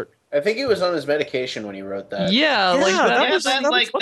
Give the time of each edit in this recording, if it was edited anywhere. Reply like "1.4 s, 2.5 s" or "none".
none